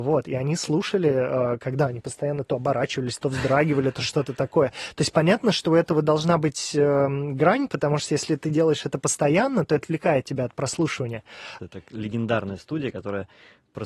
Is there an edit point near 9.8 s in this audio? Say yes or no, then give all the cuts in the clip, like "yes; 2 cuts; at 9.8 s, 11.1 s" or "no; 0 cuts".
yes; 2 cuts; at 9.8 s, 11.6 s